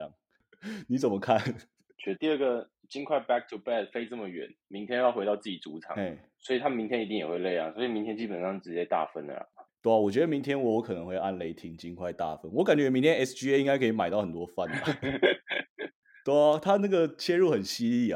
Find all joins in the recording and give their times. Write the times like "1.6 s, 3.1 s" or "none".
2.2 s, 9.7 s